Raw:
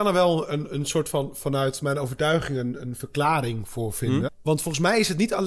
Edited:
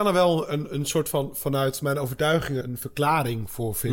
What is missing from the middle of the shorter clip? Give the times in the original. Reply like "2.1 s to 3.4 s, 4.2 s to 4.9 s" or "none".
2.6 s to 2.8 s